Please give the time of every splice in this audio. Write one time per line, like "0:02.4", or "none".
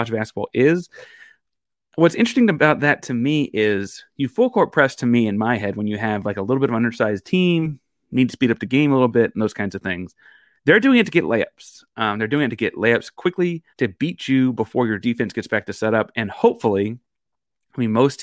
0:13.7